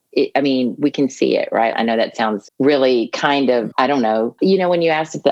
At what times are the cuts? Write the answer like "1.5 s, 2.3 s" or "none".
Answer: 1.7 s, 4.4 s